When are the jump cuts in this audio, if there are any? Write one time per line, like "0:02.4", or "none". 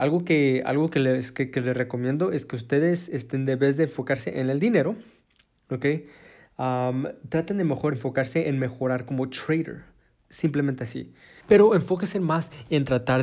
0:07.9
0:11.4